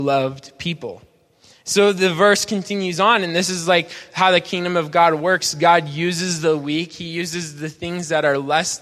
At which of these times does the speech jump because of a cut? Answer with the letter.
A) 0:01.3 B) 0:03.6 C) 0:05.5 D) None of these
D